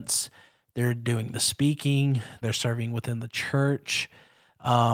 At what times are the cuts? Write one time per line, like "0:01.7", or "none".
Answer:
0:02.4

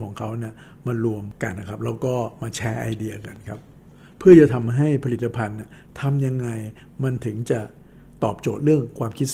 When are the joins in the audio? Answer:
0:01.5

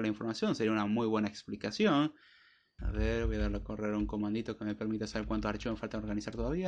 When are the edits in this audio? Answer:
0:02.8

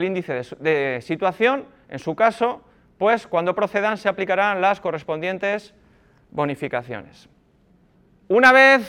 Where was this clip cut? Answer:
none

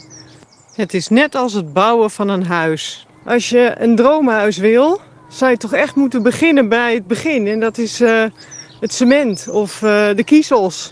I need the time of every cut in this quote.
none

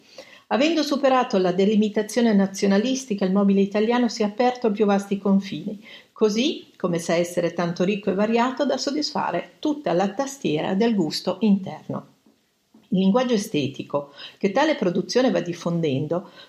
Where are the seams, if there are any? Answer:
none

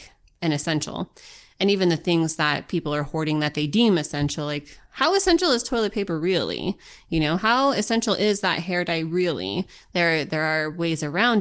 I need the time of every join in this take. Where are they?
0:04.9

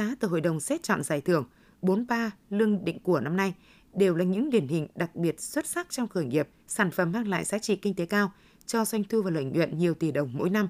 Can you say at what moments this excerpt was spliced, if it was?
0:06.6

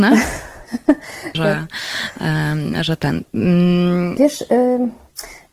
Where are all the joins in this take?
0:01.3
0:04.2

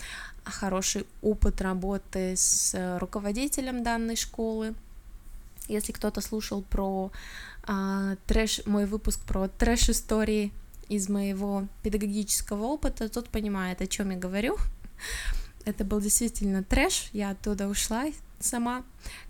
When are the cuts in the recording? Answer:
none

